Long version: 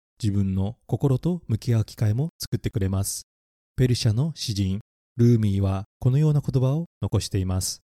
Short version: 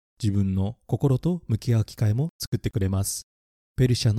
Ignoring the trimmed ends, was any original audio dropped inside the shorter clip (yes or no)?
no